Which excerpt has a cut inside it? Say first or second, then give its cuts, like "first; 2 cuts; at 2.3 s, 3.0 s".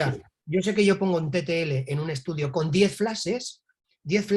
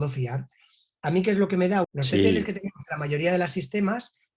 second; 1 cut; at 1.8 s